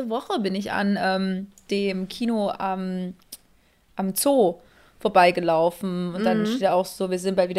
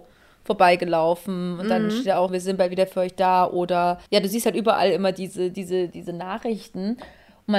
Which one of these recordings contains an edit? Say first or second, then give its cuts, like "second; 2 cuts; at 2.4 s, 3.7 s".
second; 3 cuts; at 2.3 s, 4.1 s, 5.9 s